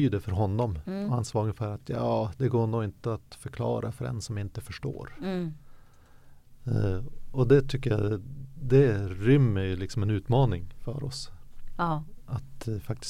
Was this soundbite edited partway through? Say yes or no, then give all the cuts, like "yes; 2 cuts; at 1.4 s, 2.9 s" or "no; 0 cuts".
no; 0 cuts